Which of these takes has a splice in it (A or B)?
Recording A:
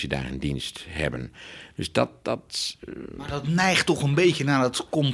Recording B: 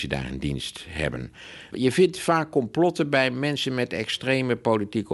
B